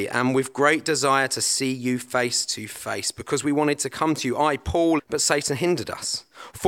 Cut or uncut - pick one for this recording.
cut